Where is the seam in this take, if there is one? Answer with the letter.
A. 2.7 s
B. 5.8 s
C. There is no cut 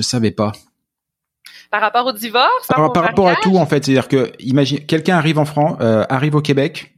A